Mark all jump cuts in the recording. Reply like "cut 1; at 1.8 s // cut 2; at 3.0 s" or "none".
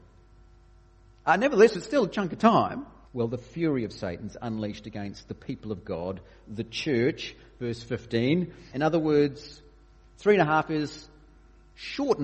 cut 1; at 3.1 s // cut 2; at 8.7 s